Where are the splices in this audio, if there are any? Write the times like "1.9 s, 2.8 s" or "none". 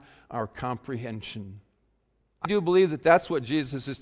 2.5 s